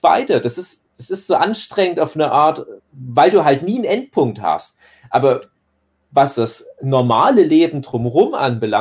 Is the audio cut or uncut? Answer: cut